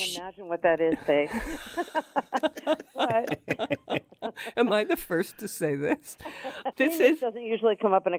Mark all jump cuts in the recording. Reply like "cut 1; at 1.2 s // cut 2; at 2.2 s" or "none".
none